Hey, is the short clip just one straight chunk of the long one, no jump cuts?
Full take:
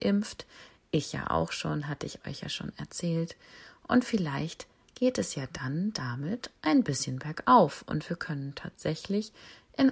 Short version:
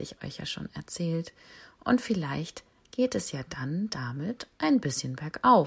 yes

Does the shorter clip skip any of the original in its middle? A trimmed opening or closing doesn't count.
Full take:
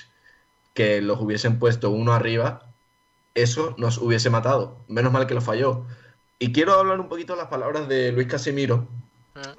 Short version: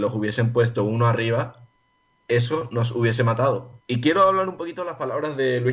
yes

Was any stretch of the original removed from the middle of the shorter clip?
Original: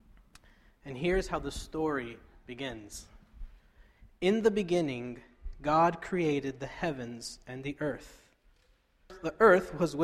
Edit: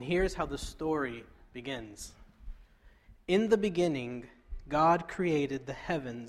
no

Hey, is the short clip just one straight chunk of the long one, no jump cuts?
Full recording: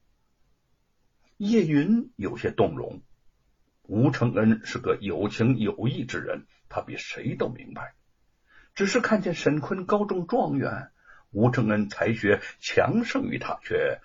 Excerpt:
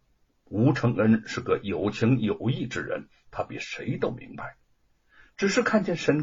yes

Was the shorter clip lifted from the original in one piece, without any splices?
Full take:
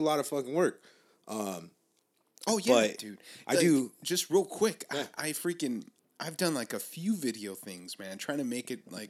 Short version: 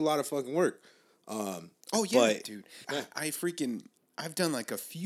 no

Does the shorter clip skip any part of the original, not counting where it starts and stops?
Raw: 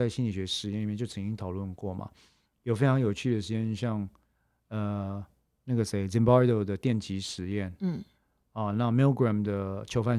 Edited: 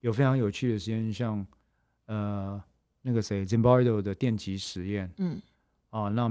no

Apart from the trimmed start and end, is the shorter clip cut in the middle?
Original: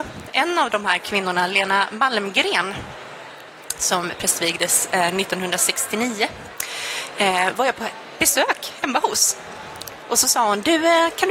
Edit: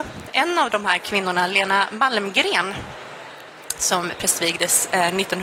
no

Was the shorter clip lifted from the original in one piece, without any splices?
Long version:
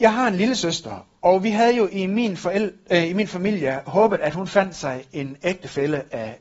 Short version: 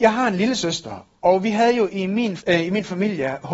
no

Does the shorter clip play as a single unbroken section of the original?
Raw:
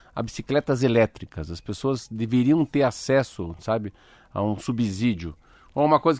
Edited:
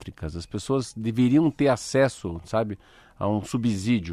yes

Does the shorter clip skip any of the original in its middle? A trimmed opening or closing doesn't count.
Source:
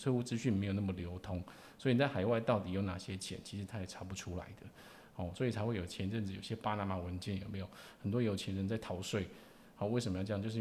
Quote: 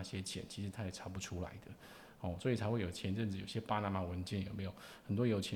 no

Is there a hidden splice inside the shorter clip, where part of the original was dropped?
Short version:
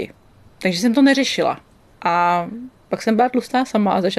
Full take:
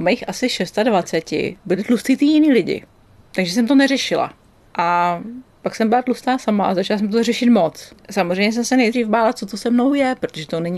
no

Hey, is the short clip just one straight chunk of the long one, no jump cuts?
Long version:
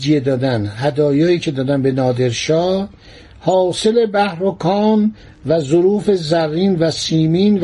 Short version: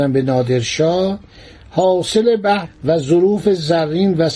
no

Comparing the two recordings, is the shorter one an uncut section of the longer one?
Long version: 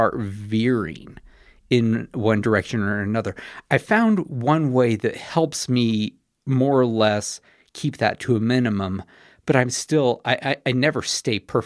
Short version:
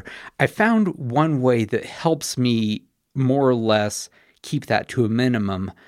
yes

